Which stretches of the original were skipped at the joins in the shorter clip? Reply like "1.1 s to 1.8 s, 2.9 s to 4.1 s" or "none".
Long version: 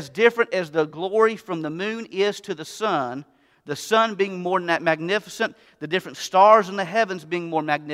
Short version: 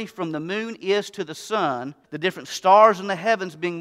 3.3 s to 5.7 s